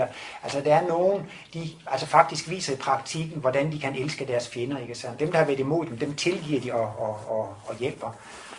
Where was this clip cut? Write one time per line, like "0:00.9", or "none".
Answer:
0:05.2